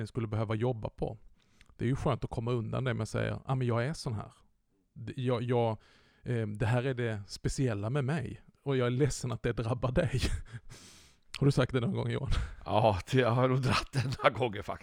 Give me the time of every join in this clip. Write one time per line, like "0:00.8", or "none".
none